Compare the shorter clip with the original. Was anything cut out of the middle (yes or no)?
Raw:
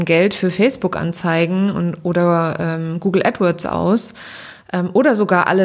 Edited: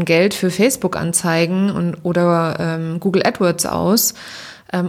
no